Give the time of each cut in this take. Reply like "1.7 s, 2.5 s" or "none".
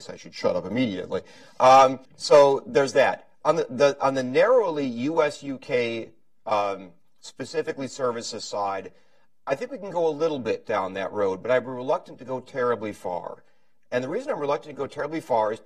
2.1 s